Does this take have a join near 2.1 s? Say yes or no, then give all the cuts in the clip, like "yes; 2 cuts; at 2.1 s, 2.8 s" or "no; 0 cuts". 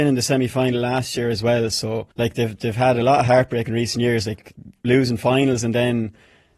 yes; 1 cut; at 2.1 s